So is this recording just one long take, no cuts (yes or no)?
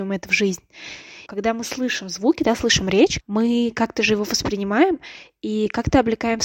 no